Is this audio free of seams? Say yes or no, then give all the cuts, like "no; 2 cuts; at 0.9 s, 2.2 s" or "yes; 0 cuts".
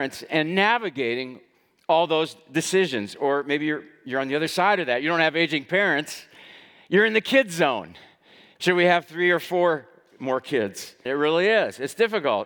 no; 2 cuts; at 8.6 s, 11.1 s